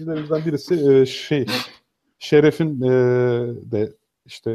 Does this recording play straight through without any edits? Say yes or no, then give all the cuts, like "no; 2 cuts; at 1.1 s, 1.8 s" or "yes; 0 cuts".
yes; 0 cuts